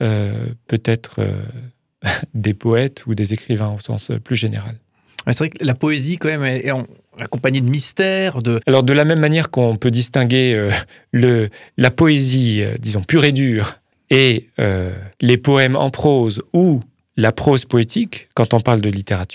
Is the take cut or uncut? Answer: cut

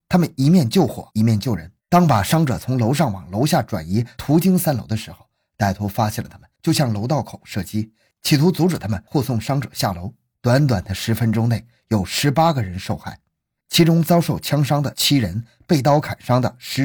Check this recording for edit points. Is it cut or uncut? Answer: cut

